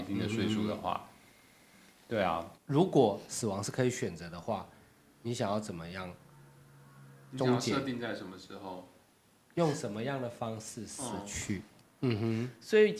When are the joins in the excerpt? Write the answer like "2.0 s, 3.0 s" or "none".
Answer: 2.5 s, 11.8 s